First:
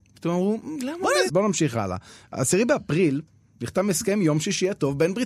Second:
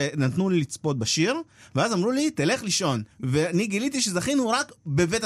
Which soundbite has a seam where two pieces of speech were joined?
first; 1 cut; at 1.3 s

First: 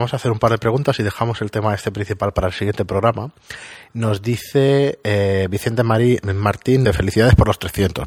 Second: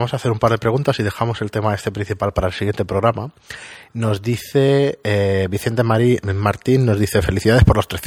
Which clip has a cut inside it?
first; 1 cut; at 6.8 s

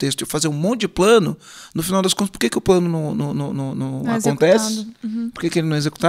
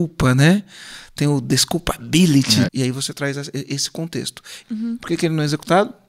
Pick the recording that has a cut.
second; 2 cuts; at 2.7 s, 4.6 s

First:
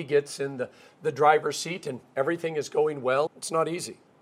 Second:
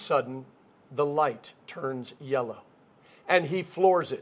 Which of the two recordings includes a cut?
first; 1 cut; at 3.3 s

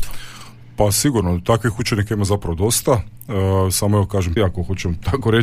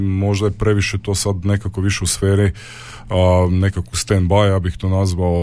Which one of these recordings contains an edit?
first; 1 cut; at 4.4 s

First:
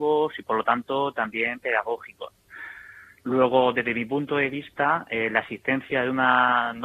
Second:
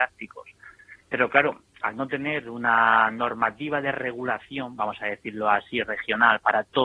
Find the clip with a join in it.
first; 1 cut; at 3.1 s

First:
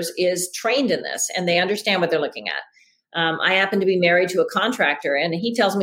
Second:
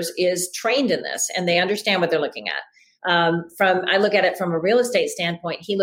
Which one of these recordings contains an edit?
second; 1 cut; at 3.0 s

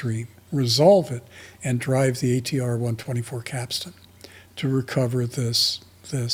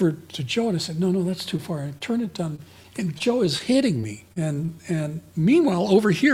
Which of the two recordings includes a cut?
second; 1 cut; at 4.3 s

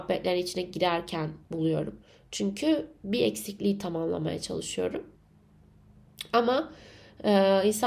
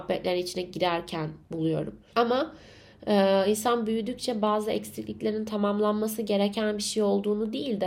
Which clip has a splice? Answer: second; 1 cut; at 2.1 s

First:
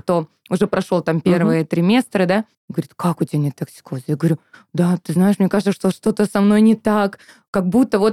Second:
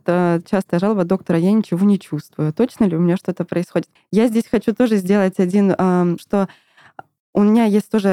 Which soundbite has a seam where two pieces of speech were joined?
second; 2 cuts; at 4.0 s, 6.2 s

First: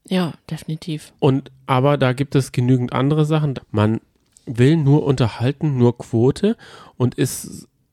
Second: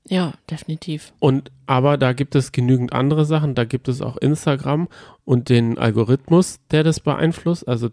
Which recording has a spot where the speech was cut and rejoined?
first; 1 cut; at 3.5 s

